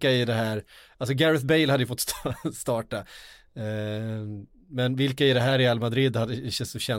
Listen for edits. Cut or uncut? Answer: uncut